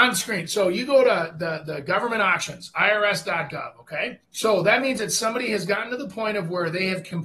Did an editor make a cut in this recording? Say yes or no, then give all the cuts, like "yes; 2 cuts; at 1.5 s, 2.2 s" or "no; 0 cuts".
yes; 1 cut; at 4.2 s